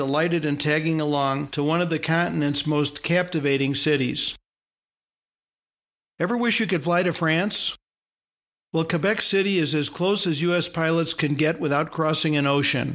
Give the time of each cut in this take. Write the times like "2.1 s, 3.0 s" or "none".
none